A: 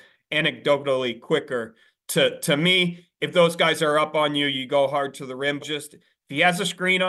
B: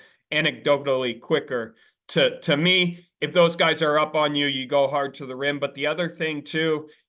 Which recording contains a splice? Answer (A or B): A